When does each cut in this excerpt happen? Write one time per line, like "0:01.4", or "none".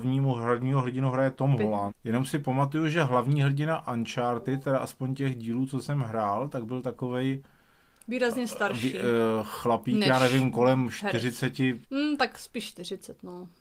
0:01.9
0:11.8